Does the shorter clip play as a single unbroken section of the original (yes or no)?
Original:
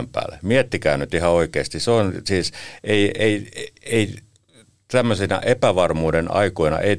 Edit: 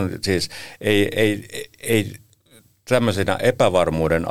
yes